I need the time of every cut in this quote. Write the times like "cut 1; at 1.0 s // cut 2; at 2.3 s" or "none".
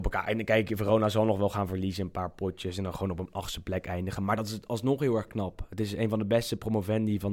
none